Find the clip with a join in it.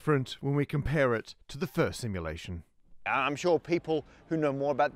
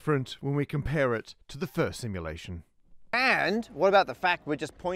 first; 1 cut; at 3.1 s

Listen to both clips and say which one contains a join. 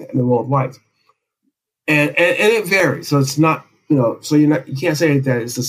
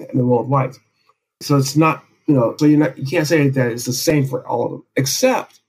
second; 2 cuts; at 1.4 s, 2.6 s

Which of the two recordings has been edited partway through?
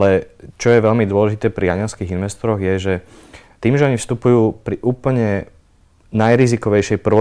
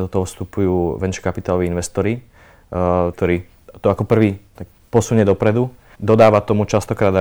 second; 3 cuts; at 3.1 s, 4.5 s, 5.9 s

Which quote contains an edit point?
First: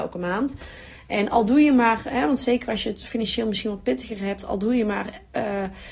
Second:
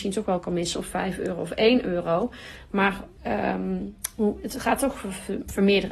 second; 1 cut; at 3.2 s

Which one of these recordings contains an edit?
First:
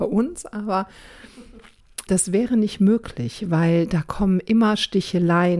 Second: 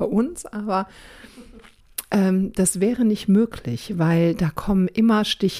first; 1 cut; at 2.1 s

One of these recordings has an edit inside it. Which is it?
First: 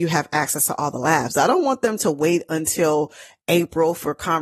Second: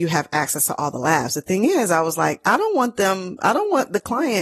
first; 1 cut; at 1.3 s

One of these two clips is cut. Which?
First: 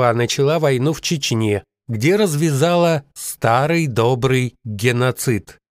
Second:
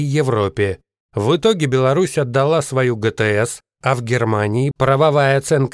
second; 1 cut; at 4.7 s

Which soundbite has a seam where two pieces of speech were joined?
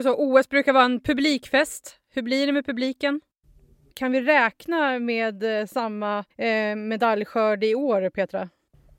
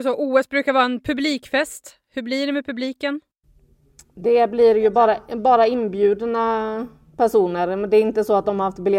first; 2 cuts; at 3.9 s, 6.3 s

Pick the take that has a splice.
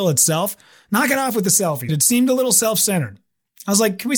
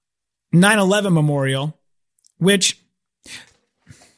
first; 1 cut; at 1.9 s

